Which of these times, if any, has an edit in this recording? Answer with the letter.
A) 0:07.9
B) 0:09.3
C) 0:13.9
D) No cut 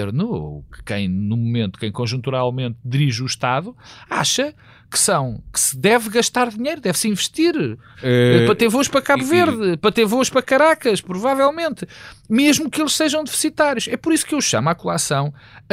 A